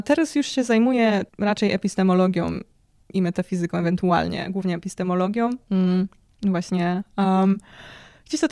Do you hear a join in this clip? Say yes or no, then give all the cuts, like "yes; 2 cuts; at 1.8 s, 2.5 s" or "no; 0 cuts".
yes; 1 cut; at 1.3 s